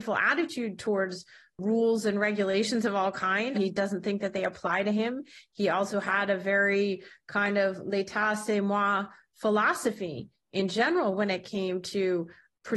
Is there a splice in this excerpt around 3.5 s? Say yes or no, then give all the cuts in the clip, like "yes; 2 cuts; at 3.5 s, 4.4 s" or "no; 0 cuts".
yes; 1 cut; at 3.5 s